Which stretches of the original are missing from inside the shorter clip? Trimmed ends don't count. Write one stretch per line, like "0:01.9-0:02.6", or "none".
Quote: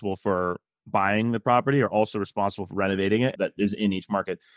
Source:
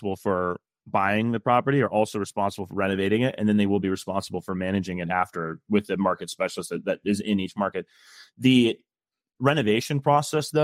0:03.4-0:06.8